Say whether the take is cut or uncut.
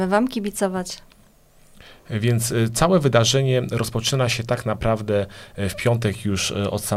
uncut